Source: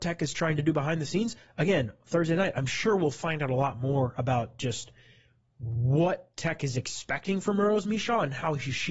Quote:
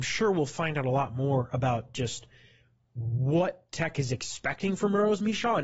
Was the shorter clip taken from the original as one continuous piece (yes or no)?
yes